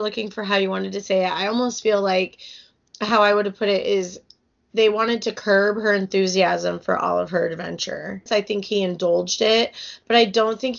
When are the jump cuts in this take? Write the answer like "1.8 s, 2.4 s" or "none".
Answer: 8.3 s